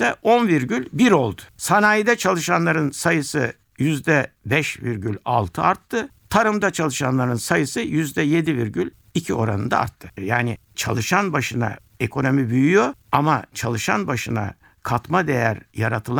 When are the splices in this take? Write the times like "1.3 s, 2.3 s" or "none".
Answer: 1.6 s, 10.2 s